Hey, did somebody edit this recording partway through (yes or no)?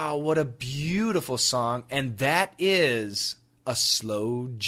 no